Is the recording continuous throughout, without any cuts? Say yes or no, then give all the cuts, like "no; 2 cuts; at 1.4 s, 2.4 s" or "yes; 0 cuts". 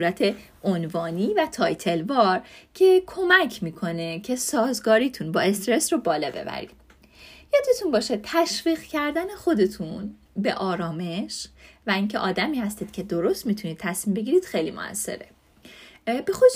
no; 1 cut; at 10.3 s